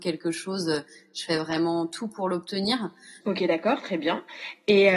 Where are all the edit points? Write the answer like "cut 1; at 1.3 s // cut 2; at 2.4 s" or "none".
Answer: cut 1; at 3.2 s